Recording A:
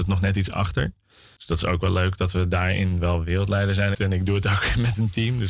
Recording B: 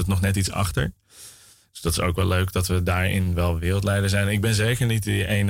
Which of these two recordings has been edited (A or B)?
A